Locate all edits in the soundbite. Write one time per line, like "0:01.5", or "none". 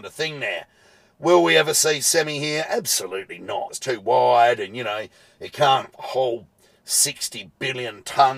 0:03.7